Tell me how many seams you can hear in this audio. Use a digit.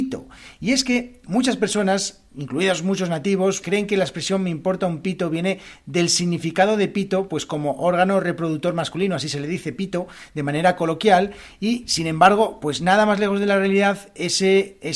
1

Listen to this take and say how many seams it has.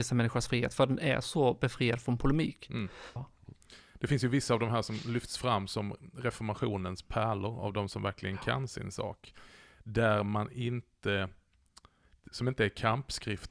1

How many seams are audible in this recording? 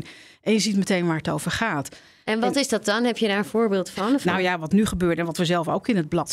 0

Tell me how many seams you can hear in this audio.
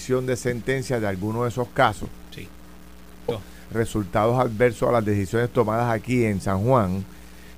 1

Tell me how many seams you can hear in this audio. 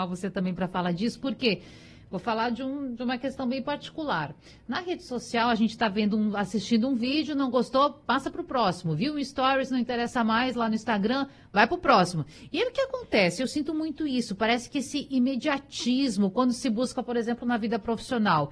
0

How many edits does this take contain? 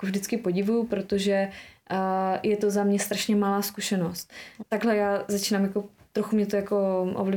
1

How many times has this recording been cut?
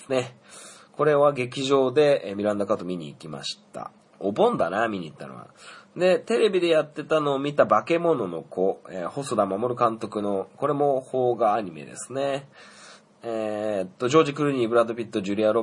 2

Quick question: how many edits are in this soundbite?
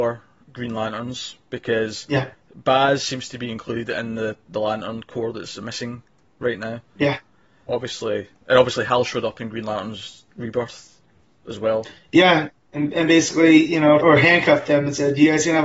2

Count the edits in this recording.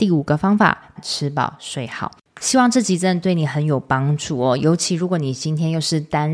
1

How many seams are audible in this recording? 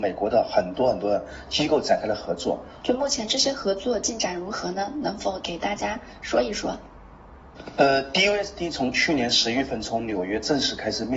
1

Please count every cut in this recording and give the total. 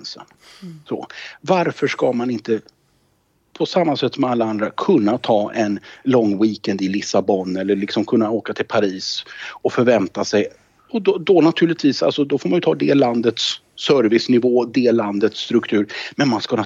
0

